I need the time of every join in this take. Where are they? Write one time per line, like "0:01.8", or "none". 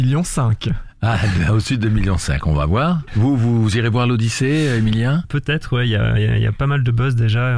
0:03.1
0:05.2